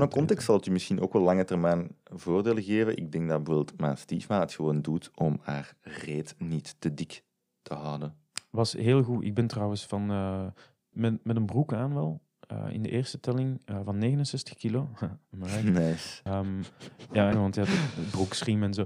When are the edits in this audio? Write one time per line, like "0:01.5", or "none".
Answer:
0:10.9
0:16.3
0:17.3